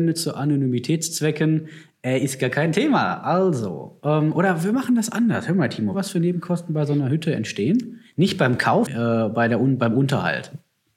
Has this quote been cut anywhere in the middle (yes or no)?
yes